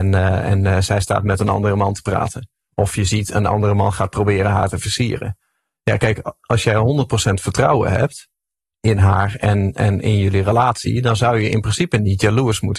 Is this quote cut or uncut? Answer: uncut